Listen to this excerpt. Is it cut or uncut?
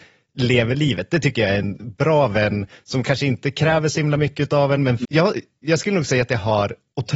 cut